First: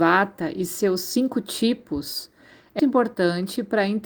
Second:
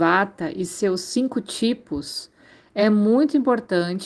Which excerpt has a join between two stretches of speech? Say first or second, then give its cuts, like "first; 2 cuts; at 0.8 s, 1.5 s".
first; 1 cut; at 2.8 s